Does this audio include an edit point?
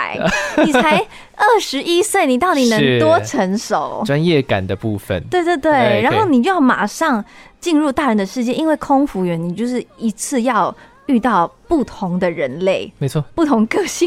no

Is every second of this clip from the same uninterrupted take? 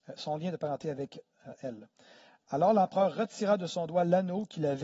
yes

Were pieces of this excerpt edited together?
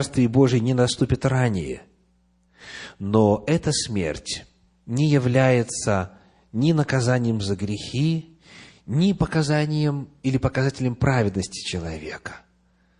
no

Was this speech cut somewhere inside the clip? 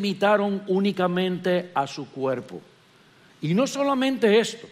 yes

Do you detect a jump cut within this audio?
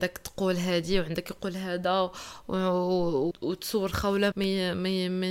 yes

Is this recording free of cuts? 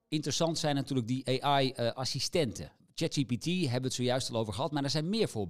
yes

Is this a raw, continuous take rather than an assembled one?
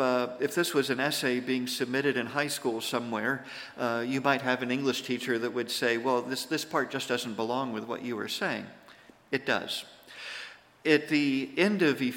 yes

